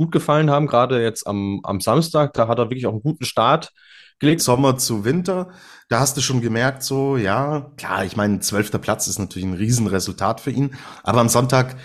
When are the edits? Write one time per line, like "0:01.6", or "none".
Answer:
0:04.4